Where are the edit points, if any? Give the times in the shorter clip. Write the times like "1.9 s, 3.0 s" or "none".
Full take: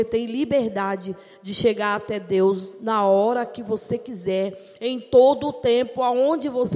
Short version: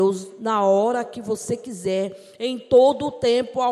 none